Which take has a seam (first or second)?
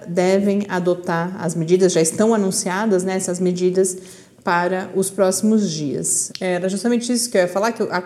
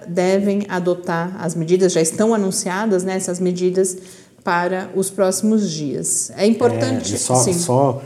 first